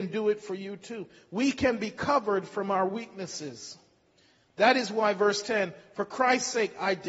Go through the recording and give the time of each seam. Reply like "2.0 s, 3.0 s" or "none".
none